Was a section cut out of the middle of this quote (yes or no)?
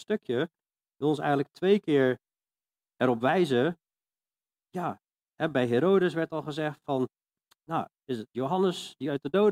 no